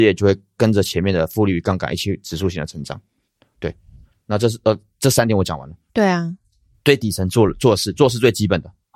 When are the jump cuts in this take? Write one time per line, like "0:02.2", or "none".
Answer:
0:05.9